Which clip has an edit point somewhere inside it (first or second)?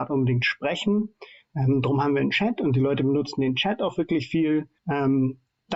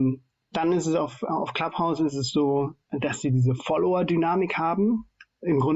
first